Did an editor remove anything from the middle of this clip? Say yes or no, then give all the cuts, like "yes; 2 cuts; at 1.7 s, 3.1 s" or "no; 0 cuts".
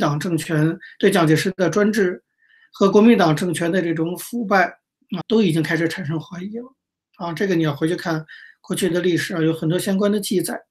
yes; 1 cut; at 5.2 s